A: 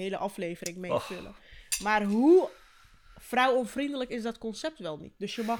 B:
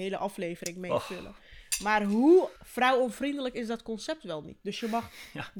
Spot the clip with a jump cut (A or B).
B